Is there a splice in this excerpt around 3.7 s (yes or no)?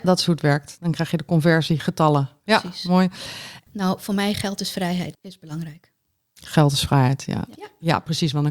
yes